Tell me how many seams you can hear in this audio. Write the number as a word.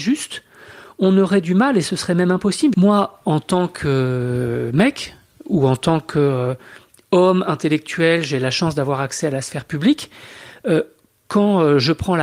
one